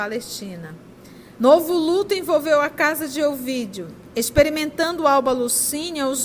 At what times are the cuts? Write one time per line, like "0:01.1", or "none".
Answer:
0:01.4